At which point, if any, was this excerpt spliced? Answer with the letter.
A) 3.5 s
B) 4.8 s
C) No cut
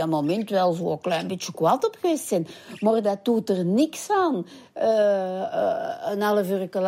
C